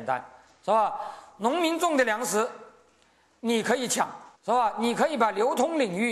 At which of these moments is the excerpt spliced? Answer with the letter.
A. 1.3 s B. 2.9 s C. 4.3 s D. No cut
C